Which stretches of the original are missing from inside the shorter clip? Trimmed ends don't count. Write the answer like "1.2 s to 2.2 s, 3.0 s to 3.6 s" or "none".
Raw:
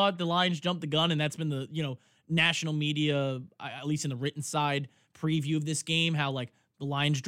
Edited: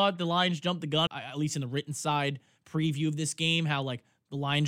1.1 s to 3.6 s